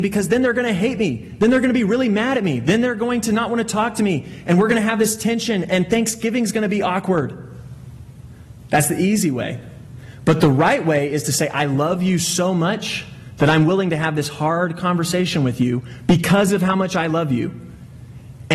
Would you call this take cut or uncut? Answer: uncut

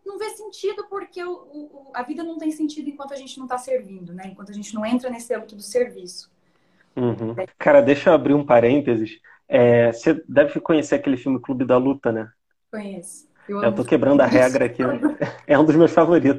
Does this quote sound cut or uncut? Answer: cut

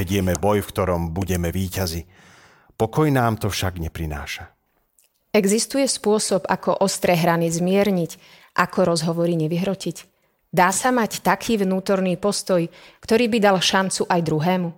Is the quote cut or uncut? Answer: uncut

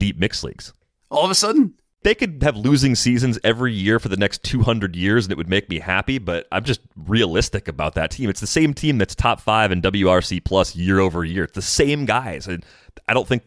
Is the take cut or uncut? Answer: cut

